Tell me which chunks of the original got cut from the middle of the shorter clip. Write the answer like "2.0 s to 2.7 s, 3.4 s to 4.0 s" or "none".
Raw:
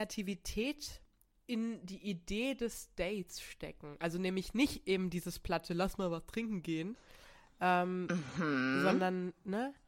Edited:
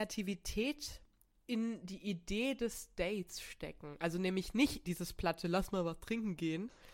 4.8 s to 5.1 s